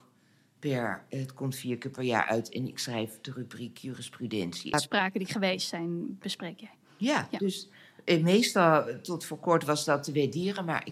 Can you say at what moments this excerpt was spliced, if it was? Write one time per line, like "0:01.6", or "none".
0:04.7